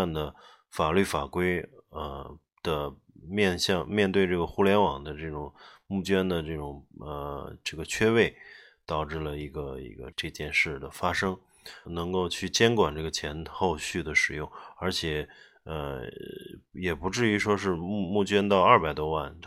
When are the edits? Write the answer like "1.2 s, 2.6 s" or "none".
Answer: 10.1 s, 11.9 s